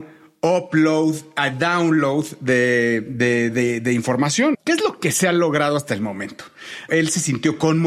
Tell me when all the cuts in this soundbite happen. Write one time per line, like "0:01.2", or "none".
0:04.5
0:06.9